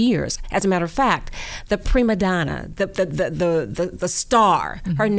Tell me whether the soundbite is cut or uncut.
uncut